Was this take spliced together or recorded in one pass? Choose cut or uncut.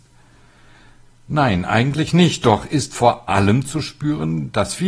uncut